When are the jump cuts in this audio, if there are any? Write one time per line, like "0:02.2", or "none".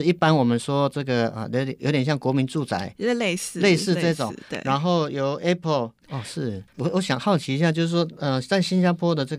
0:06.0